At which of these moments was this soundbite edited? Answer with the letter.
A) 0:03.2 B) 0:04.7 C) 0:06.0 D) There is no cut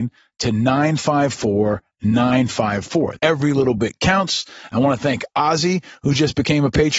A